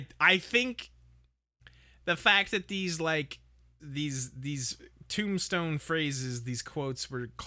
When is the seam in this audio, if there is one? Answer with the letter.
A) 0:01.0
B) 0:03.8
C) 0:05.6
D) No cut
B